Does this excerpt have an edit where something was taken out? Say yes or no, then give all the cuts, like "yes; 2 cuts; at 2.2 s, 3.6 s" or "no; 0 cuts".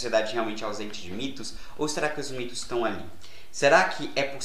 no; 0 cuts